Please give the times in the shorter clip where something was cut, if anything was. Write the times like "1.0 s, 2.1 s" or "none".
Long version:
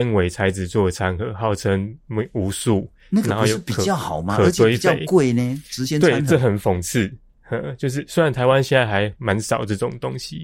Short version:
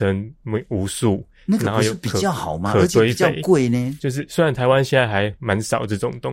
4.0 s